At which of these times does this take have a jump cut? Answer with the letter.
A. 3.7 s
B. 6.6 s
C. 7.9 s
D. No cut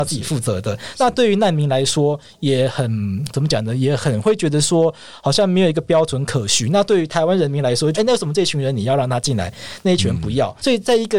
C